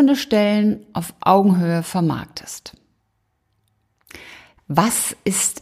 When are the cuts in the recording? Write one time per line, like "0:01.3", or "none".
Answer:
0:04.6